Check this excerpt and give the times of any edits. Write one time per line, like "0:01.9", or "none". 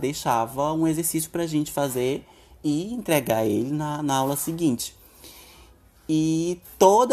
none